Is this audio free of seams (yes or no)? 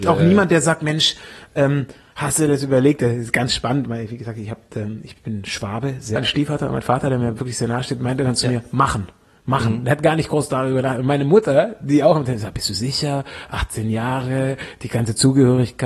no